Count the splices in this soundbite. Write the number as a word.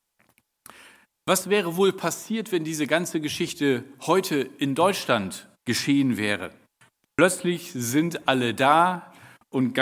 one